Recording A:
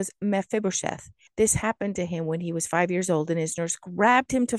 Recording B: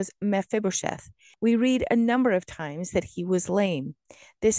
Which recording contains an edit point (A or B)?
A